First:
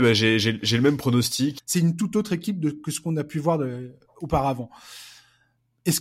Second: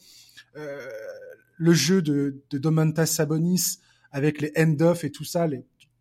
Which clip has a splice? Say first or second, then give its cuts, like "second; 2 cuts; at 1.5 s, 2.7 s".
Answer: first; 1 cut; at 1.6 s